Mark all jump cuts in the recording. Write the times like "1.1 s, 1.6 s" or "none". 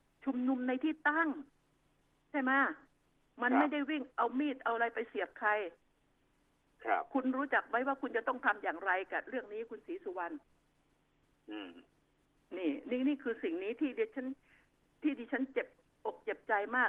none